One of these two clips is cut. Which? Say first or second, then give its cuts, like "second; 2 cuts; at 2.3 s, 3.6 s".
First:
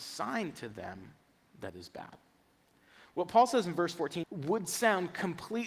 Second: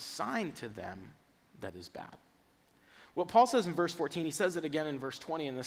first; 1 cut; at 4.2 s